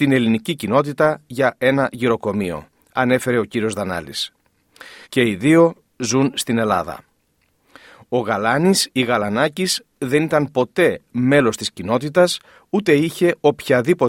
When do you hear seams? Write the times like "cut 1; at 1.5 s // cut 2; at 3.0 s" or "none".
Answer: cut 1; at 5.0 s